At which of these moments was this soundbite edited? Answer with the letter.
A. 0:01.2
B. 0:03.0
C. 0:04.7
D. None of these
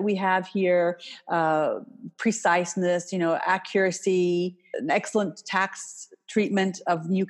C